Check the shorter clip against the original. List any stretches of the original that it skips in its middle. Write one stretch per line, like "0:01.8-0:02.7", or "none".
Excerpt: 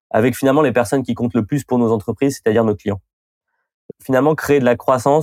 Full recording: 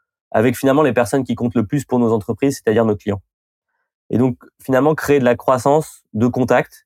0:04.1-0:04.5